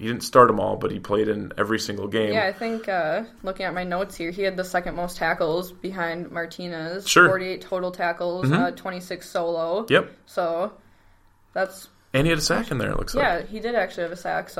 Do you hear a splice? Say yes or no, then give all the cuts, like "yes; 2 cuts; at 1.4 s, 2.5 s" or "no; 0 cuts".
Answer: no; 0 cuts